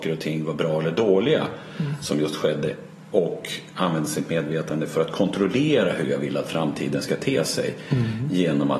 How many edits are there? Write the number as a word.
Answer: zero